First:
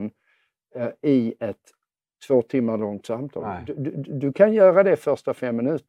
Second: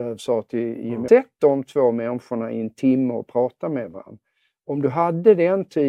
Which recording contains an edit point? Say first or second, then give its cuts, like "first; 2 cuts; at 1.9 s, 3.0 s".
second; 1 cut; at 1.1 s